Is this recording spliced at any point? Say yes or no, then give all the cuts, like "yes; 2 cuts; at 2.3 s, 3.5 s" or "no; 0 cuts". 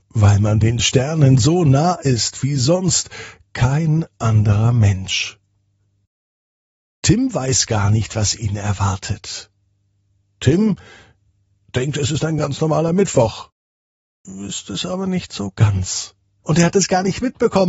yes; 1 cut; at 16.4 s